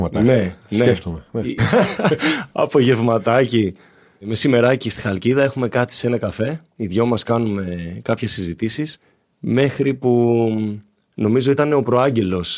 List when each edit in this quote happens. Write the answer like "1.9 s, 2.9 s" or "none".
1.6 s